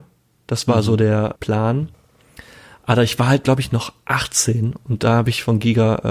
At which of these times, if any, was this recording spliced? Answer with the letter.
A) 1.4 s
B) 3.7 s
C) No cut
A